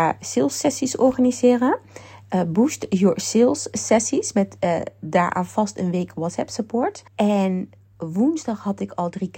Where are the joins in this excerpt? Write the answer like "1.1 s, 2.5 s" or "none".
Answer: 7.1 s